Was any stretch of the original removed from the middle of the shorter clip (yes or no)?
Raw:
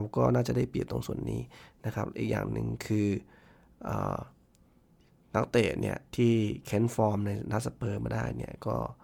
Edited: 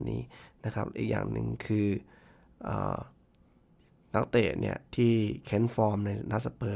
no